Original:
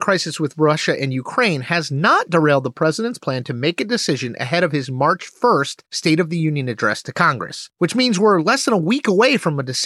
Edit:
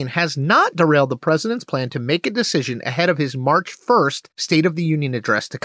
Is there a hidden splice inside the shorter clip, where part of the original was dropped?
no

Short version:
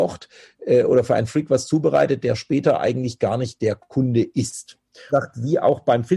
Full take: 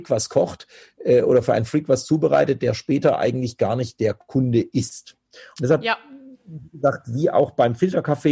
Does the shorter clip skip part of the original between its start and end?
yes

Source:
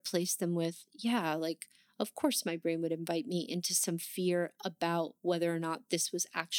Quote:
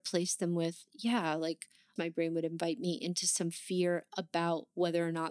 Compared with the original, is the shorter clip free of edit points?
no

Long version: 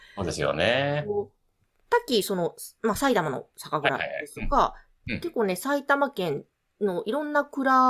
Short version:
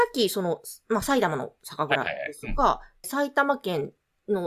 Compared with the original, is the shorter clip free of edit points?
no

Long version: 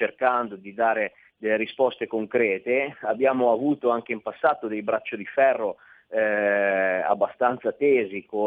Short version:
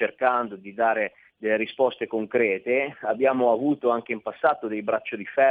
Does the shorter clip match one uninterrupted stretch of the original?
yes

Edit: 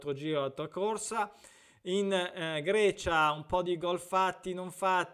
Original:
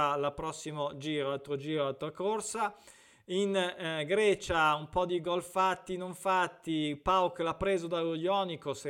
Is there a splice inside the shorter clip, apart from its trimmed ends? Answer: no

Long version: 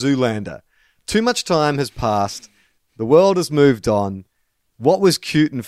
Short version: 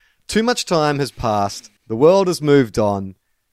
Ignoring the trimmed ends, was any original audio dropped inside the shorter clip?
yes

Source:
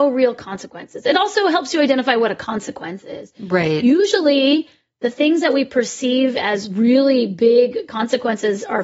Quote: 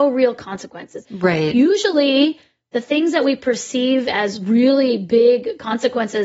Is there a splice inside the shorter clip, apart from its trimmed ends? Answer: yes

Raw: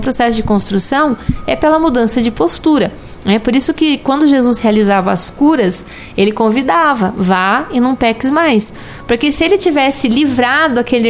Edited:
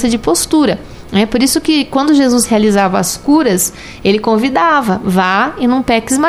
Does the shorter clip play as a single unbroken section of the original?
yes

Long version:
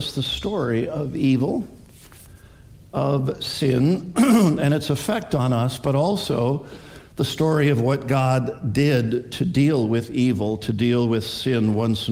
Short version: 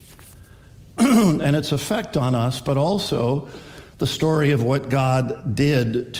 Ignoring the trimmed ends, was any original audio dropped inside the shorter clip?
yes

